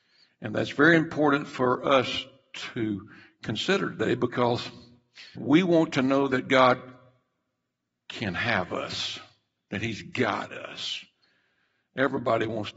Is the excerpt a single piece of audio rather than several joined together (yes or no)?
no